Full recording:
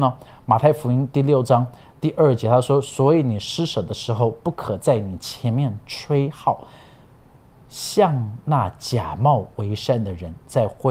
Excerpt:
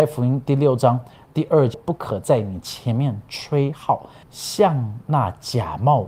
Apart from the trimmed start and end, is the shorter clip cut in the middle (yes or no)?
yes